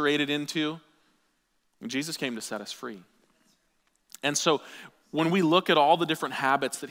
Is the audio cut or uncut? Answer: uncut